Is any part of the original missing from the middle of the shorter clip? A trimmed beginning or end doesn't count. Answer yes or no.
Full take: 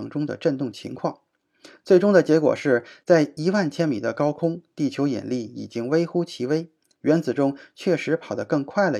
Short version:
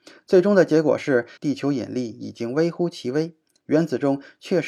yes